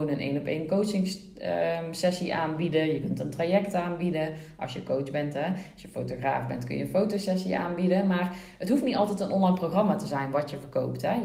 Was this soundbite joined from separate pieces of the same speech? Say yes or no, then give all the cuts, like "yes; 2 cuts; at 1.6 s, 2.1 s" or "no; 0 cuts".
no; 0 cuts